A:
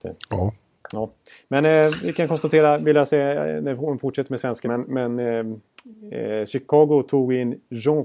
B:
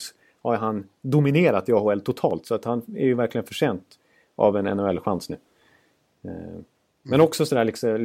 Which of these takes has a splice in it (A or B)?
A